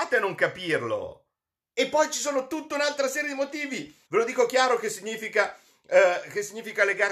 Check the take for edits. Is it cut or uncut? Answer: cut